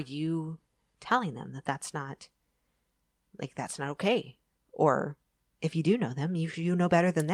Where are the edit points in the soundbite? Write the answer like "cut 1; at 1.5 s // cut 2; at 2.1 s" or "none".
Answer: cut 1; at 4.5 s